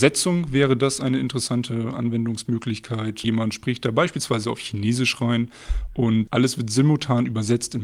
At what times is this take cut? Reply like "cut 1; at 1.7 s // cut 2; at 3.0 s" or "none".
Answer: cut 1; at 3.2 s // cut 2; at 6.3 s